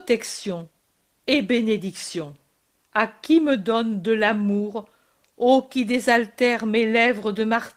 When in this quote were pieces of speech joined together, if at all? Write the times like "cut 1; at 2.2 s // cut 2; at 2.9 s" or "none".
cut 1; at 2.8 s